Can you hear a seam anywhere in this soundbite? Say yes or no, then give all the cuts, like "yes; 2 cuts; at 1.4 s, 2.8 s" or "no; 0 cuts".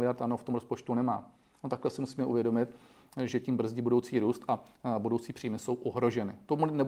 no; 0 cuts